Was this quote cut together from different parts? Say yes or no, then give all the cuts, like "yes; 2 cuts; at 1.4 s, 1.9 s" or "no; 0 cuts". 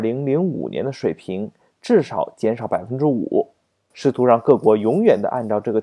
yes; 1 cut; at 3.9 s